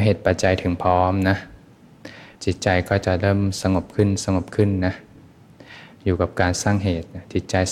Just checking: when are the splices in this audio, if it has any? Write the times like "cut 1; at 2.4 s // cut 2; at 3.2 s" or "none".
cut 1; at 2.3 s

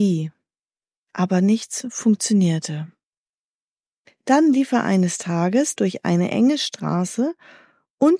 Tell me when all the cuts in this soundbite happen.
cut 1; at 4.0 s // cut 2; at 5.8 s

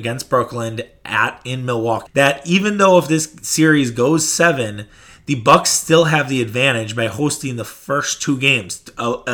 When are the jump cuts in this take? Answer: cut 1; at 2.1 s

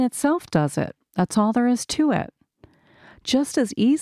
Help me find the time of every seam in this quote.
none

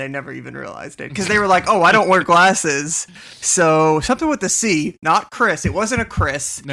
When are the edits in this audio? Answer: none

